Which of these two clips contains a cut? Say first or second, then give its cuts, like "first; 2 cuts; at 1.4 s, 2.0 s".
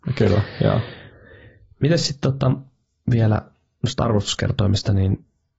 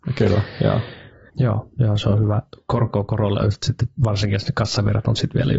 second; 1 cut; at 1.3 s